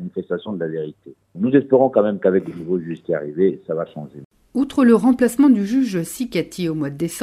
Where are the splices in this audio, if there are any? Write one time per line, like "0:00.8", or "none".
none